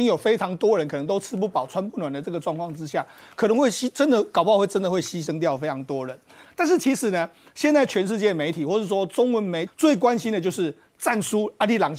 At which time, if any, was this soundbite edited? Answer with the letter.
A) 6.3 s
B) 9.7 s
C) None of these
B